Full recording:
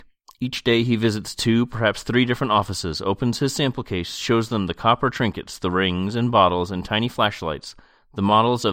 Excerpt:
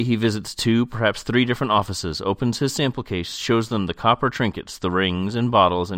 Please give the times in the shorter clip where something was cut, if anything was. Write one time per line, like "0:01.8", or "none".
none